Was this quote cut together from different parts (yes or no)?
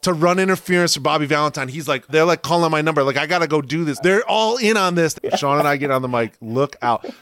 yes